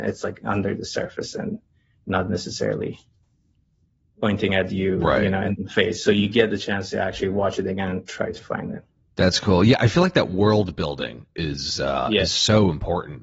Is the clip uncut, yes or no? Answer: yes